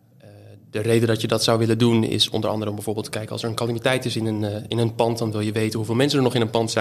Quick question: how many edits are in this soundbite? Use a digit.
0